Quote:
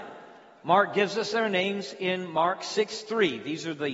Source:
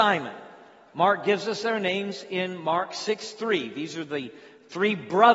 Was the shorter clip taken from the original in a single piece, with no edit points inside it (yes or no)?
yes